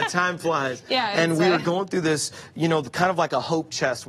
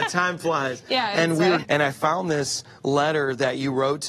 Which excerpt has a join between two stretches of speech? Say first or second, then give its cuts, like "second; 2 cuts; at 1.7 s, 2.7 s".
second; 1 cut; at 1.6 s